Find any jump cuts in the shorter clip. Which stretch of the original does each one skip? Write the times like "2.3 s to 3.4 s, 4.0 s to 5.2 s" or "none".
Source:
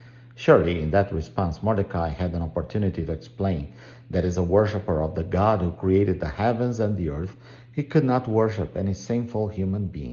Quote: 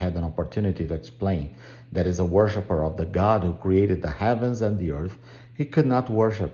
none